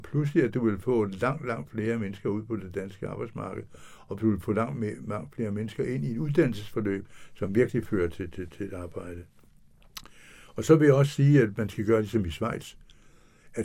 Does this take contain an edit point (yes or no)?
no